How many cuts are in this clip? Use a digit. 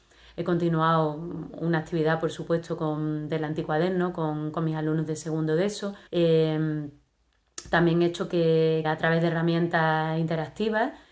2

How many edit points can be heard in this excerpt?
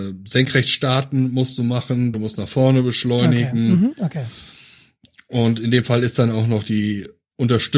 1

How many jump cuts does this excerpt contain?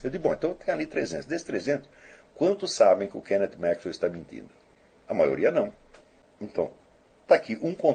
0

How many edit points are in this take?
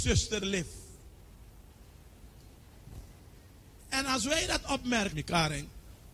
2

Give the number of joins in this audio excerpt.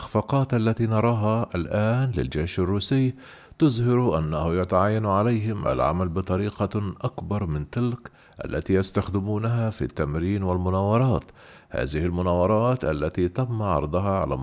0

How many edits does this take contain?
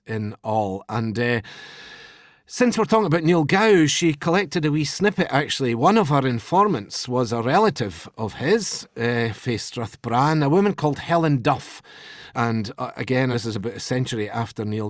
2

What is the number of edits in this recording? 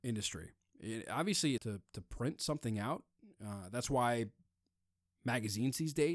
1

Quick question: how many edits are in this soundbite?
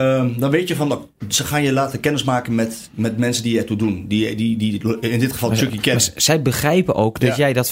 0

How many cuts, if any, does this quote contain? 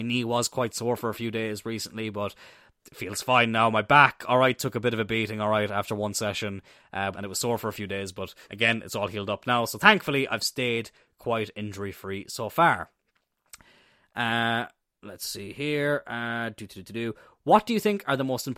2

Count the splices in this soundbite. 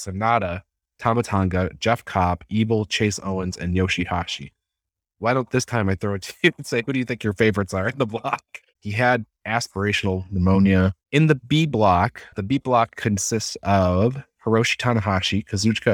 2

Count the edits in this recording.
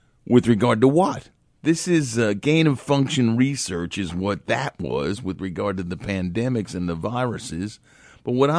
1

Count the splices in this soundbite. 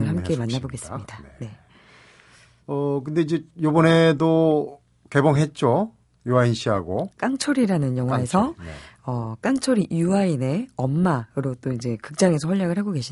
1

